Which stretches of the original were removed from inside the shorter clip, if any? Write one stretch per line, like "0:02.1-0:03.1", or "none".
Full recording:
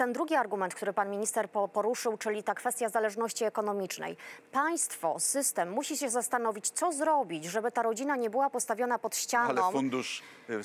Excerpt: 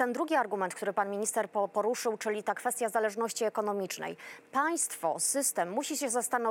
none